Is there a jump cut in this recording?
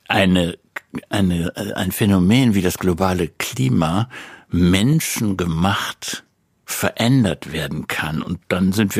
no; 0 cuts

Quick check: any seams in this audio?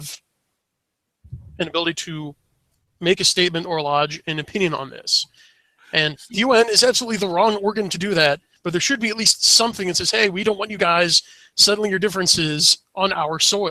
no; 0 cuts

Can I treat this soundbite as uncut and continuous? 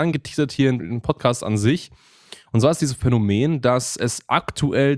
yes; 0 cuts

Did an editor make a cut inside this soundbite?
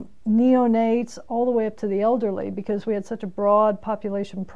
no; 0 cuts

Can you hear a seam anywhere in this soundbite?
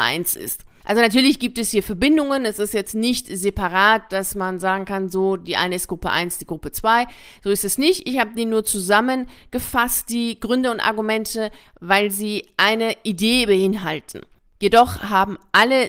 no; 0 cuts

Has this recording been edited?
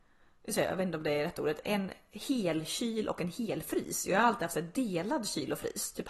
yes; 1 cut; at 1.6 s

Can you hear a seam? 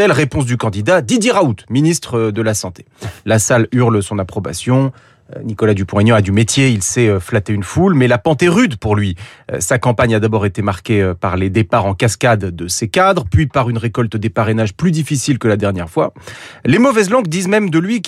no; 0 cuts

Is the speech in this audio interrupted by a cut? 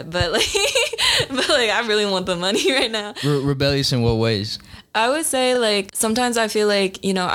no; 0 cuts

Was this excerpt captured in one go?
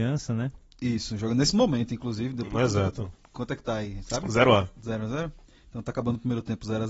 yes; 0 cuts

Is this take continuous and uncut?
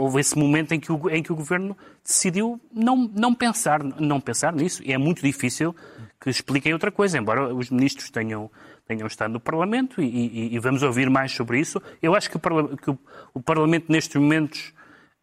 yes; 0 cuts

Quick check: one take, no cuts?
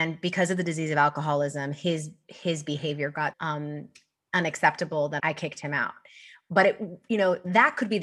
no; 2 cuts; at 3.3 s, 5.2 s

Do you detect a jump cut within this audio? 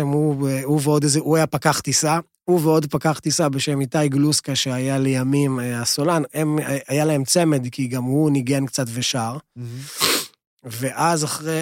no; 0 cuts

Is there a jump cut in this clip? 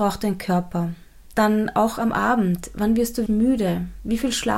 yes; 2 cuts; at 1.3 s, 3.3 s

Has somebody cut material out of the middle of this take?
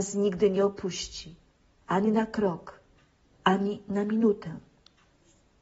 no; 0 cuts

